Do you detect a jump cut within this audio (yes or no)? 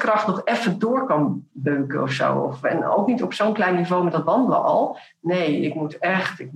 no